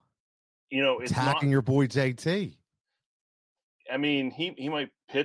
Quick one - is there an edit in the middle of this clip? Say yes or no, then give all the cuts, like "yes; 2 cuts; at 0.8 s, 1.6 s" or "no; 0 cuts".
no; 0 cuts